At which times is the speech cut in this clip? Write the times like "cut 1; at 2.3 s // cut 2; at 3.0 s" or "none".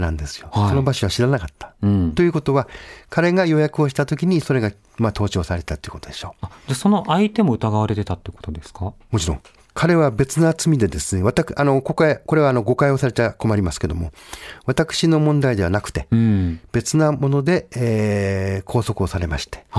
none